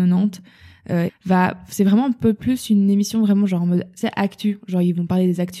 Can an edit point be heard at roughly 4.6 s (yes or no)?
no